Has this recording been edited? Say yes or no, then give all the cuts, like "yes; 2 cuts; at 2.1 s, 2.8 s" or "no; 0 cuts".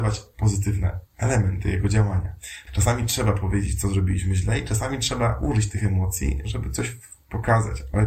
yes; 2 cuts; at 1.1 s, 2.7 s